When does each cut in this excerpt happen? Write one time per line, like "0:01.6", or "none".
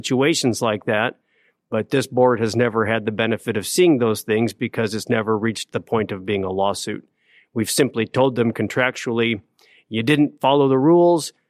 none